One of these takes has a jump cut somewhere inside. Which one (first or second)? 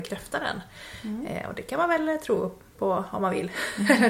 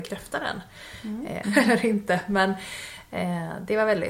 second